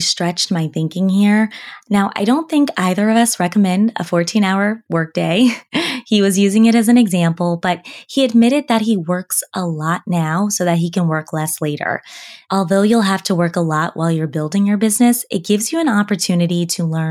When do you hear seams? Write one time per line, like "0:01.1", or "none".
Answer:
none